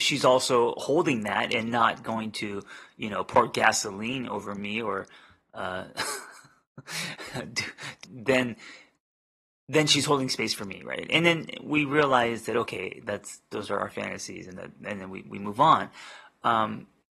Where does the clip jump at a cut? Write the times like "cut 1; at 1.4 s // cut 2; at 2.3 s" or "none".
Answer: cut 1; at 8.0 s